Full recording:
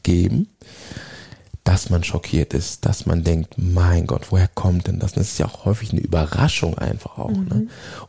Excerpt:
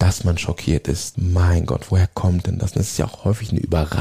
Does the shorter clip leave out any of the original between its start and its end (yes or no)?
yes